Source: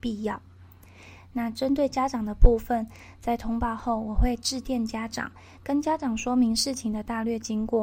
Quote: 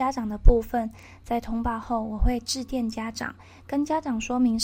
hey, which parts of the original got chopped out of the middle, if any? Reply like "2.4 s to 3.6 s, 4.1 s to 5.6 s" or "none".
none